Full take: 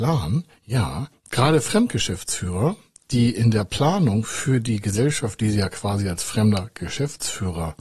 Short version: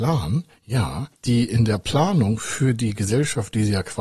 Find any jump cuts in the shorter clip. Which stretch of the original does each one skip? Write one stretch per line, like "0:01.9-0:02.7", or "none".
0:01.1-0:03.0

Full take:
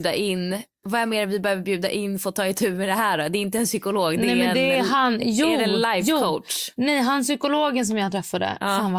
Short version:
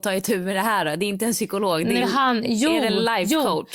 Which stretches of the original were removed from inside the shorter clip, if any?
0:04.3-0:04.8

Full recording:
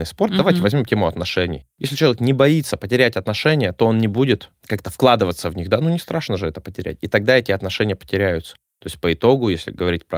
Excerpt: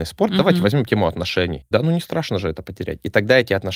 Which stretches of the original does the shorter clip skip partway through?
0:01.7-0:05.7

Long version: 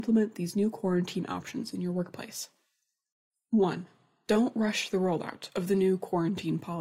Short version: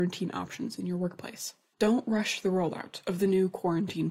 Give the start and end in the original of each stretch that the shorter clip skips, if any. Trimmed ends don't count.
0:02.7-0:04.2

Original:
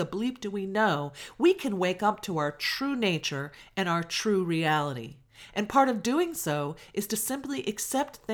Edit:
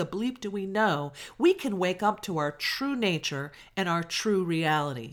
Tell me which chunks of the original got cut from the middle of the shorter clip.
none

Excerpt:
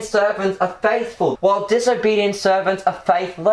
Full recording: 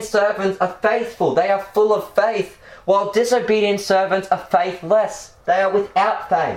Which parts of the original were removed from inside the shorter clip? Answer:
0:01.3-0:02.8

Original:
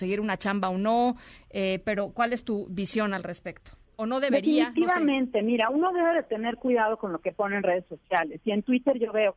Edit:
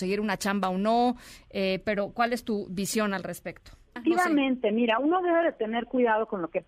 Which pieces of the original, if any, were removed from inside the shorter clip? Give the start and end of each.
0:04.0-0:04.7

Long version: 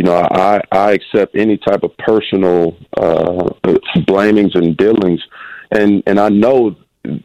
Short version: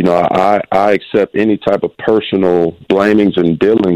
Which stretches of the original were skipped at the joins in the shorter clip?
0:02.9-0:04.1

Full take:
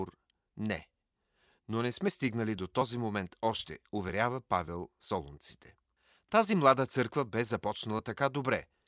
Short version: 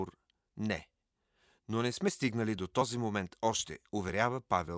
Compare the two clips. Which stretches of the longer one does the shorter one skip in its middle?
none

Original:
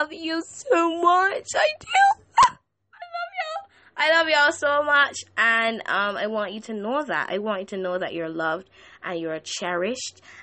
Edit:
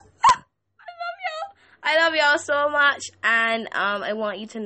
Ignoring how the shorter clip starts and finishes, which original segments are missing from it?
none

